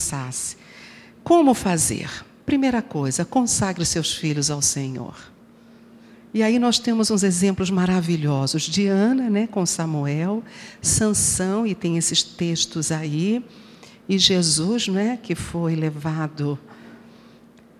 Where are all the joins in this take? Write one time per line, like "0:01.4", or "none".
none